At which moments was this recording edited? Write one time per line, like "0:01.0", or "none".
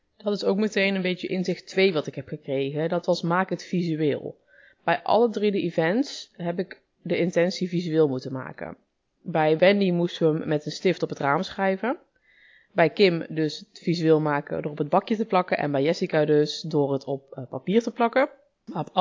none

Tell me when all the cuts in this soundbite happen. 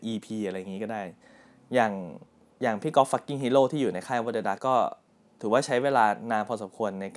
0:04.6

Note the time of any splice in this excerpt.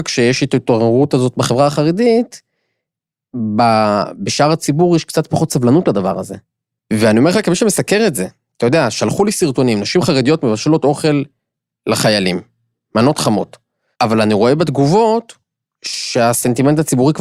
0:13.9

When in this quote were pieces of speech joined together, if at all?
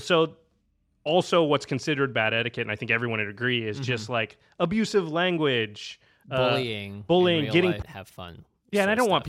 0:07.8

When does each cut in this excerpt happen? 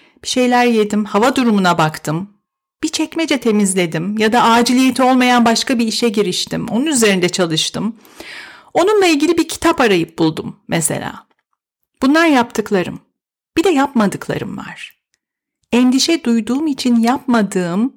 none

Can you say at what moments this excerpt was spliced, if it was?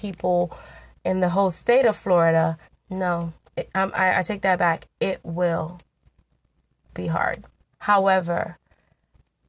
0:02.7
0:07.7

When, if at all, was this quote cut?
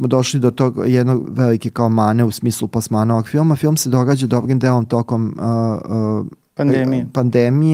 0:01.2

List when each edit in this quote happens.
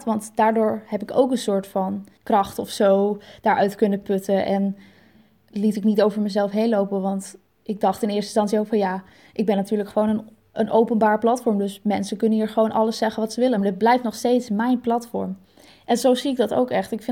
0:10.5
0:13.6

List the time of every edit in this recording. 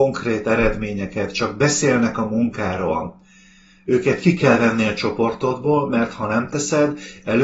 none

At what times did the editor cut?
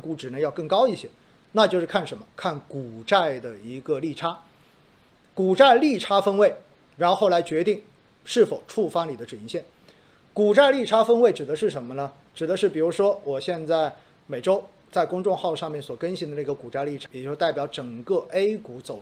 0:17.1

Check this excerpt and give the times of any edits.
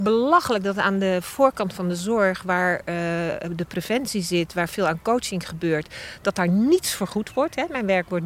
none

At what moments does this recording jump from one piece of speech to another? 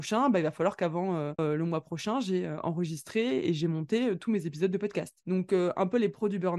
0:01.4
0:05.2

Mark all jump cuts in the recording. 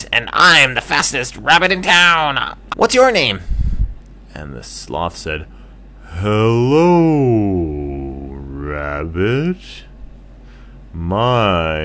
0:02.7

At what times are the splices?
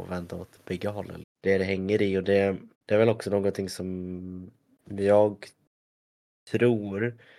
0:01.2
0:02.7

